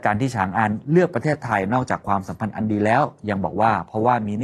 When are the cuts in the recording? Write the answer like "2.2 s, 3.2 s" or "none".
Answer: none